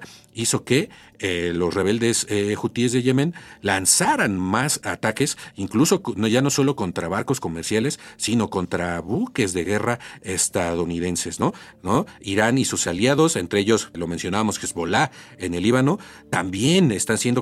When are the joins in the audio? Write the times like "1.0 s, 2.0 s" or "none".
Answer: 11.7 s, 13.9 s

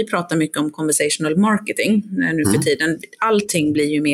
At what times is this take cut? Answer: none

